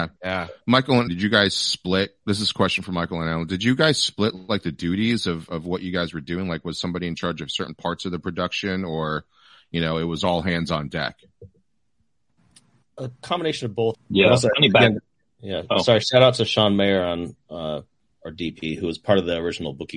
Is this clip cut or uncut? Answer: cut